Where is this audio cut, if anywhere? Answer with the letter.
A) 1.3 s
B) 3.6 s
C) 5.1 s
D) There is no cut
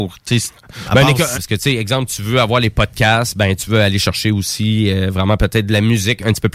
A